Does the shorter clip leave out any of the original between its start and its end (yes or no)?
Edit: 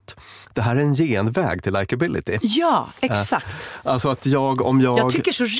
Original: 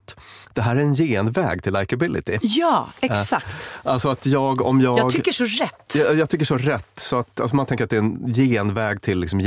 no